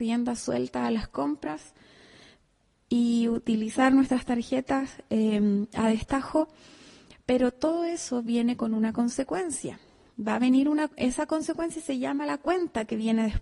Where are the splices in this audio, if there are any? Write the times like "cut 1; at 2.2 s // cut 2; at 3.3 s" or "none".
none

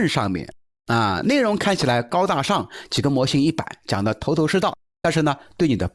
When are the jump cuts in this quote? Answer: none

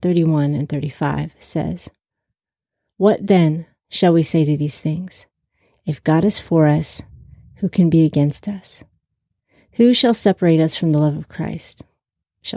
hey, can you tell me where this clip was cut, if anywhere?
none

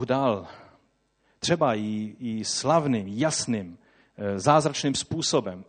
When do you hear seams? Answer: none

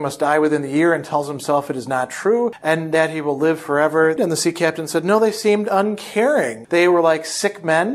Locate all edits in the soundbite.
cut 1; at 4.2 s // cut 2; at 6.6 s

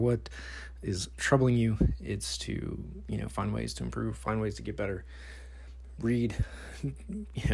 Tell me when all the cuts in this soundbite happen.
none

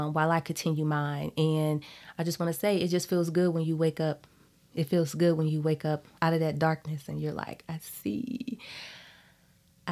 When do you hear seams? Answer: cut 1; at 6.2 s

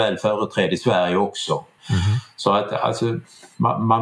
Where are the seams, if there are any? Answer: cut 1; at 1.8 s

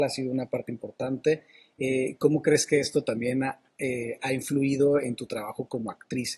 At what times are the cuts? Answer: none

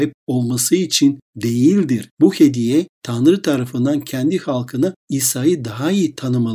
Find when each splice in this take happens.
cut 1; at 2.1 s

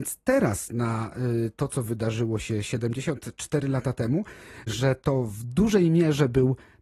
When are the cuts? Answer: cut 1; at 4.7 s

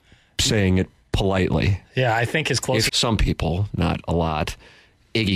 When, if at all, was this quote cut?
cut 1; at 2.9 s

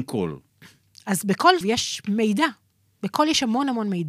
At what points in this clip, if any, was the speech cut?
cut 1; at 1.6 s

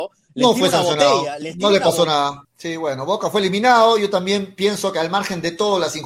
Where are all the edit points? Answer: cut 1; at 2.4 s

